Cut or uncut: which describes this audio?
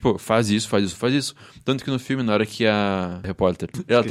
uncut